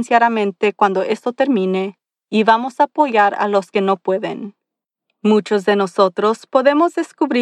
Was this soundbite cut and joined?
no; 0 cuts

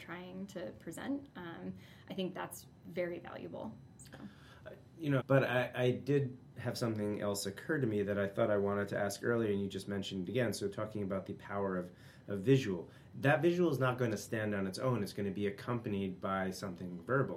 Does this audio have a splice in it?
yes; 1 cut; at 5.2 s

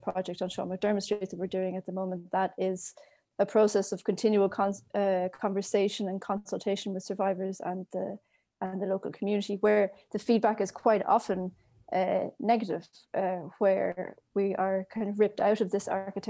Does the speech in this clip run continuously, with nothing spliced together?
yes; 0 cuts

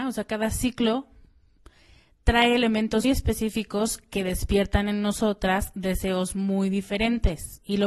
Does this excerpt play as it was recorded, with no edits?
no; 1 cut; at 3.0 s

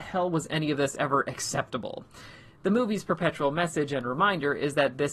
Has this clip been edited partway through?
no; 0 cuts

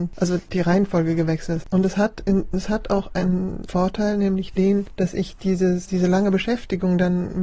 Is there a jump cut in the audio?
yes; 1 cut; at 1.6 s

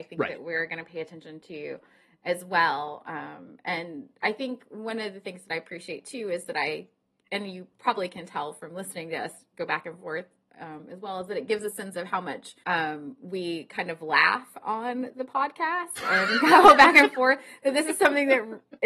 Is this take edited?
yes; 1 cut; at 12.6 s

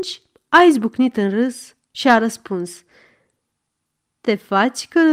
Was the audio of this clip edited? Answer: no; 0 cuts

